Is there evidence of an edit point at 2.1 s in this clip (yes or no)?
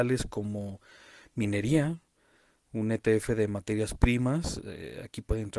no